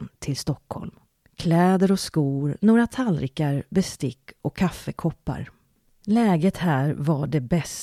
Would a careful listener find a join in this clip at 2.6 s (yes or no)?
no